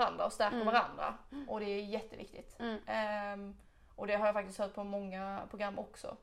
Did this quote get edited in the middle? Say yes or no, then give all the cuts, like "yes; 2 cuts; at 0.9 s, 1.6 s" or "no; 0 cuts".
no; 0 cuts